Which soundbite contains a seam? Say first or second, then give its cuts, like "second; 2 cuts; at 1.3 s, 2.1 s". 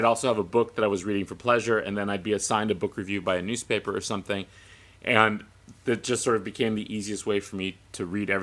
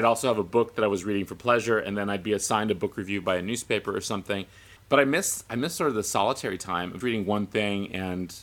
second; 2 cuts; at 4.8 s, 7.0 s